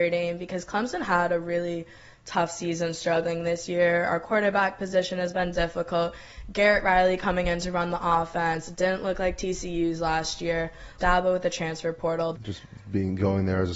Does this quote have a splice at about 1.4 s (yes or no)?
no